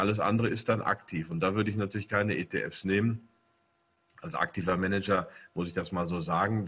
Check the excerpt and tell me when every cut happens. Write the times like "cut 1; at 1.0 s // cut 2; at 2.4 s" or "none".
none